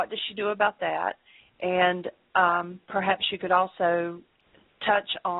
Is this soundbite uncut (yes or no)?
yes